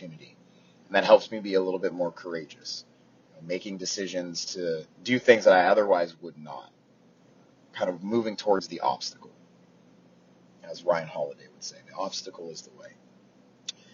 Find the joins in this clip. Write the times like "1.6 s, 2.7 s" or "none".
4.9 s